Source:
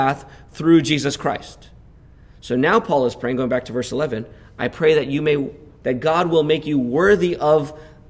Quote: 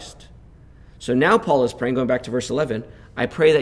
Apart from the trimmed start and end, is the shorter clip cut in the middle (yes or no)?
no